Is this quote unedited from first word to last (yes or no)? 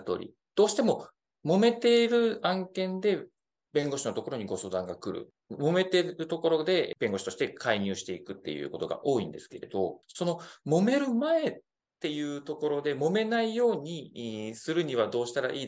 yes